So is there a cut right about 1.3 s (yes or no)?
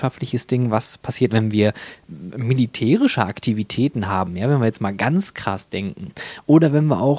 yes